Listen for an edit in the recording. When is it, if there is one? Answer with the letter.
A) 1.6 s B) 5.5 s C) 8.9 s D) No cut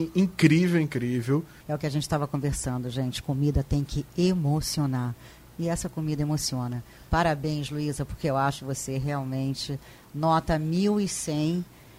A